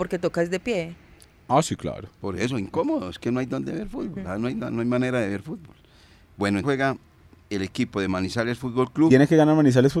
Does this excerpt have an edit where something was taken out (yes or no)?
yes